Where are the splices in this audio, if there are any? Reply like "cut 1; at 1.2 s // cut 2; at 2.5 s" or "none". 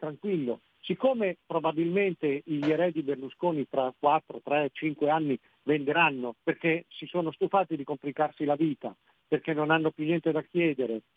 cut 1; at 6.4 s